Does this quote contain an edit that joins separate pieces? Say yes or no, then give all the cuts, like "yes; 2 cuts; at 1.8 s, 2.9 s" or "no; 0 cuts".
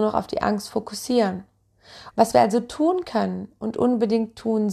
yes; 1 cut; at 2.1 s